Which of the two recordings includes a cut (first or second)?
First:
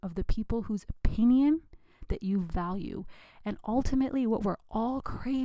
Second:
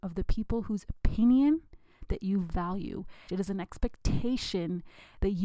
second